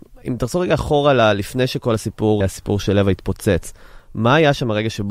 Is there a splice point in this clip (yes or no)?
yes